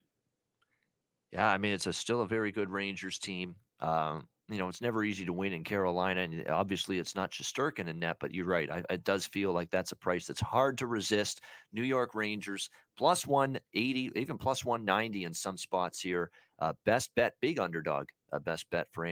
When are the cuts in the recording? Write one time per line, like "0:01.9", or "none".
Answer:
none